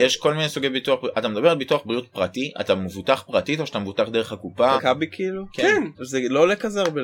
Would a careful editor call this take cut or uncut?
cut